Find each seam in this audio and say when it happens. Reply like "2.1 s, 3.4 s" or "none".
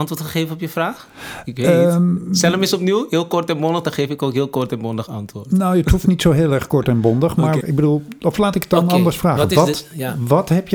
7.6 s